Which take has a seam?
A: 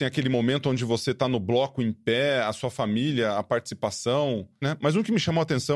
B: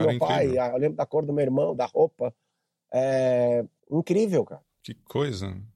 A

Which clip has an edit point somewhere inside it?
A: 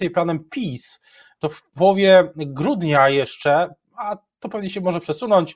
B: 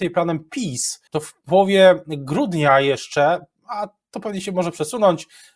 B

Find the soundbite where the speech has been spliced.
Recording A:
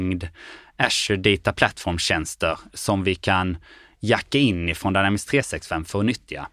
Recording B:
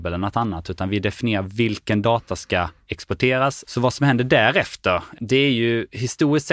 B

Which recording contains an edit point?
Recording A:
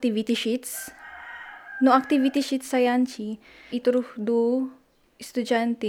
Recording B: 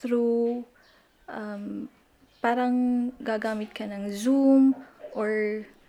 A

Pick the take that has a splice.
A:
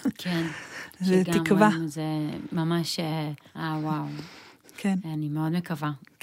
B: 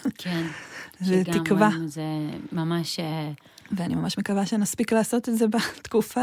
A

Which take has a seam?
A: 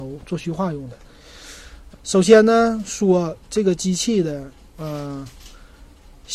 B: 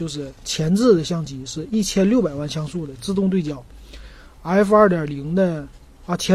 A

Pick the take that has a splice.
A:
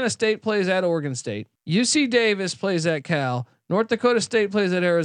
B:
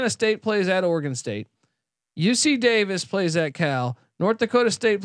A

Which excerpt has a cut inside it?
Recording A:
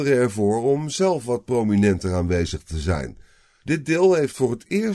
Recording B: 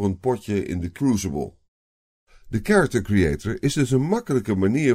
A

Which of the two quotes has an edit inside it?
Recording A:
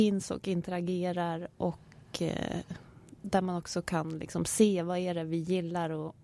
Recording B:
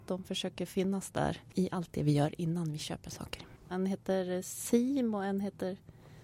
B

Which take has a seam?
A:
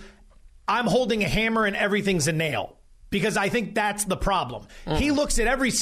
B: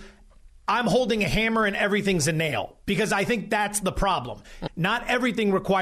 B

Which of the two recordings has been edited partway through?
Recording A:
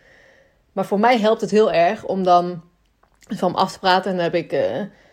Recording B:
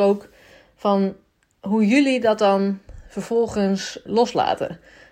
B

